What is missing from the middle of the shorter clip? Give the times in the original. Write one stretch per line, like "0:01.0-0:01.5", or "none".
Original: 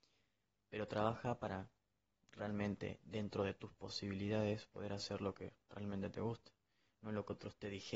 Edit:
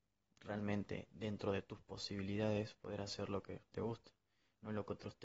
0:05.6-0:06.1